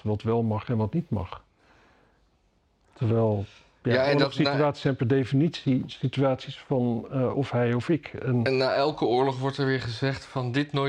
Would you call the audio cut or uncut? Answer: uncut